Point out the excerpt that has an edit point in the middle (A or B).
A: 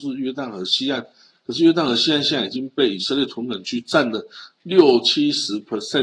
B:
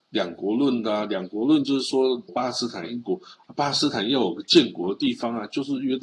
B